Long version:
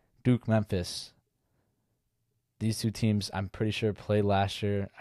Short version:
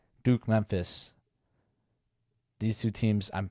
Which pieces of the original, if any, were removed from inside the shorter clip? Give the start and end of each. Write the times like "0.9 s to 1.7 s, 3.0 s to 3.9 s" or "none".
none